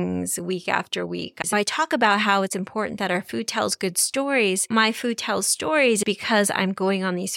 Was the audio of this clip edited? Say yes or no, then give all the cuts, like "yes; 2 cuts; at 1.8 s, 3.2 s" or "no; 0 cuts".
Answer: yes; 1 cut; at 1.4 s